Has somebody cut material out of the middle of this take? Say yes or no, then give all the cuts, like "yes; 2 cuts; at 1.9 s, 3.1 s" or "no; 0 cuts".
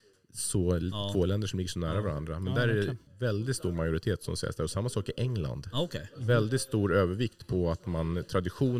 yes; 1 cut; at 3.1 s